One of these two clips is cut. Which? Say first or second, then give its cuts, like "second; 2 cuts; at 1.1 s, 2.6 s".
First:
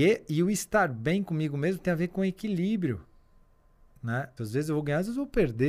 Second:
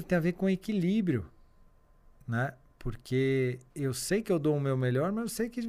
first; 1 cut; at 4.4 s